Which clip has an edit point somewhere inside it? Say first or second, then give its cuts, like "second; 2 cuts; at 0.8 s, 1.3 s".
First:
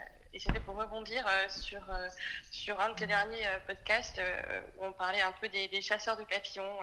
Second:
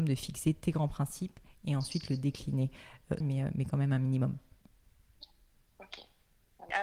second; 1 cut; at 3.2 s